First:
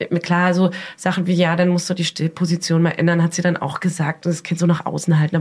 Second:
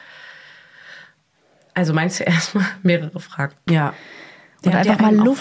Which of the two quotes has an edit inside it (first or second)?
second